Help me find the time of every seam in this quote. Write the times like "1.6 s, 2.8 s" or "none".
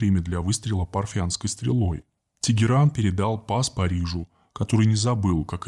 none